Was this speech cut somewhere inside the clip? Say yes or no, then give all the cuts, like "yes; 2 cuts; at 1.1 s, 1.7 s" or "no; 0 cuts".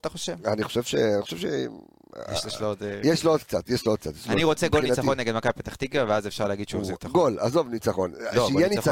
no; 0 cuts